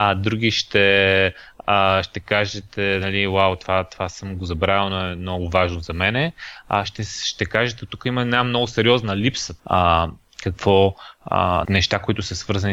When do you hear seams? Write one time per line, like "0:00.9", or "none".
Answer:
0:09.6
0:11.6